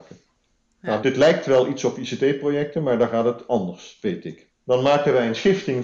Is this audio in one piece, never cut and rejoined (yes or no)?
no